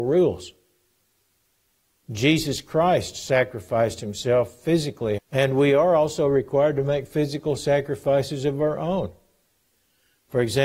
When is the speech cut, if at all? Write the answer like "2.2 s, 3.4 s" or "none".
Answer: 5.2 s